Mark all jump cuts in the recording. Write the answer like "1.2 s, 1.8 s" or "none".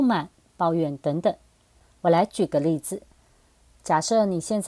2.0 s